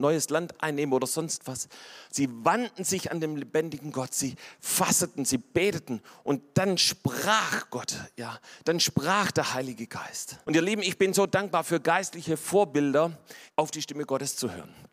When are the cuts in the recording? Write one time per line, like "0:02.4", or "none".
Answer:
0:02.1
0:10.4
0:13.5

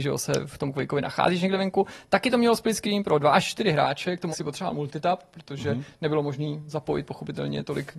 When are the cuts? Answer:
0:04.3

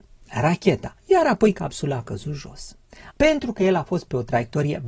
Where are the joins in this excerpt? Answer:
0:01.0
0:03.1

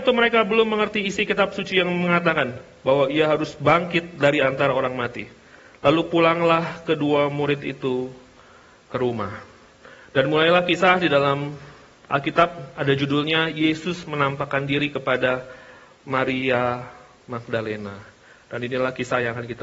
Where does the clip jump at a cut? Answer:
none

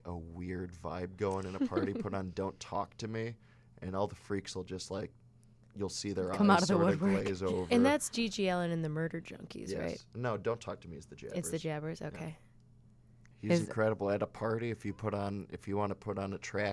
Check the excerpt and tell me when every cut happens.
0:13.3

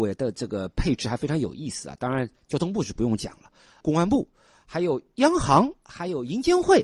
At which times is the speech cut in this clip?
none

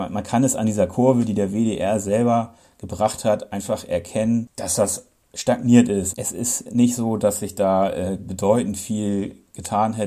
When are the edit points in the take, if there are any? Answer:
0:06.1

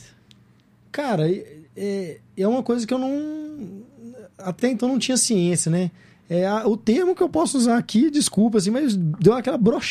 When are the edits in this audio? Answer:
none

